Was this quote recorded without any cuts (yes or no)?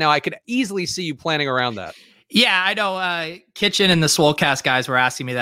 yes